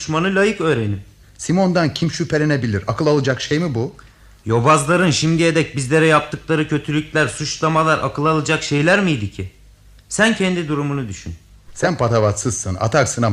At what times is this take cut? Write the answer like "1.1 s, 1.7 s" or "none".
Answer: 1.2 s, 11.7 s